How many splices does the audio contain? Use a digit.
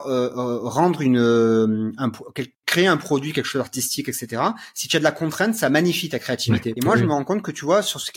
1